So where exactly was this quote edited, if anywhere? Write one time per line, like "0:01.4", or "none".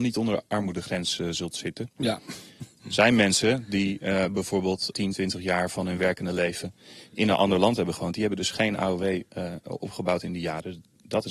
none